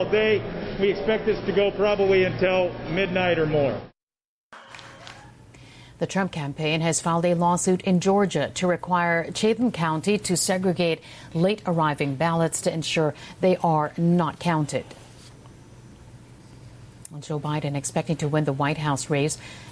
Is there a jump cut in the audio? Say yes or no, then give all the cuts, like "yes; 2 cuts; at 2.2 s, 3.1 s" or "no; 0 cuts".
no; 0 cuts